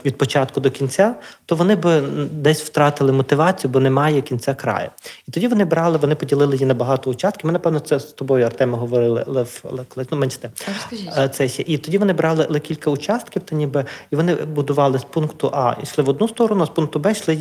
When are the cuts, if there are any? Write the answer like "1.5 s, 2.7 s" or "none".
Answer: none